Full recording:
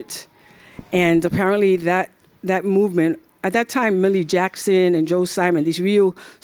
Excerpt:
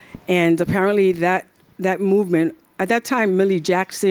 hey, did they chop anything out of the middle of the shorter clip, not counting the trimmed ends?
no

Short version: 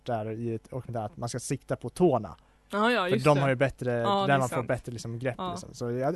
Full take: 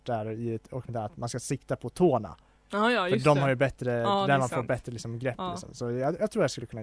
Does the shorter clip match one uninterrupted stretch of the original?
yes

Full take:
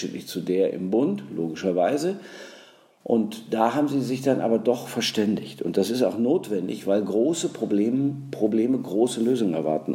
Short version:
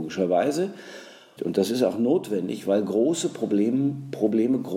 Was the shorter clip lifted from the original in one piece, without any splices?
no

